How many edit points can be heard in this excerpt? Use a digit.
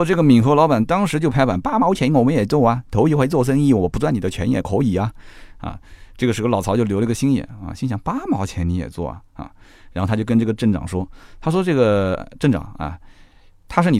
0